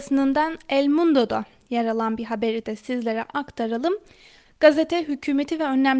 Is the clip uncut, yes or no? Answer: no